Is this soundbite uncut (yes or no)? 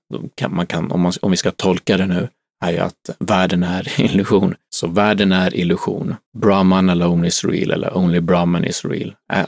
no